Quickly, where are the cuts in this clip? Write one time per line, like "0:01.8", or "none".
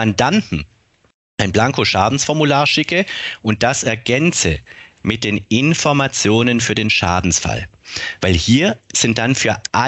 none